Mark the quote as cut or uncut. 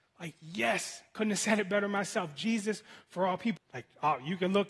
cut